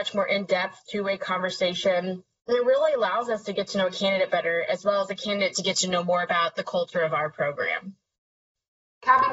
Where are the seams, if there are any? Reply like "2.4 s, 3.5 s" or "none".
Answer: none